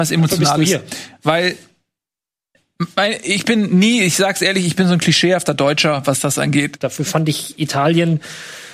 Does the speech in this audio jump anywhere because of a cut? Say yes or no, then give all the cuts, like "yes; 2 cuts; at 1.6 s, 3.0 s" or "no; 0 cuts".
yes; 1 cut; at 6.8 s